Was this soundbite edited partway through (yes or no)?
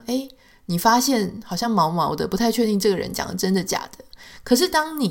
no